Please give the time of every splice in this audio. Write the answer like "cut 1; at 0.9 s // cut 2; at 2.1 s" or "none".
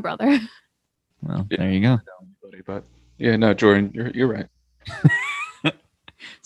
none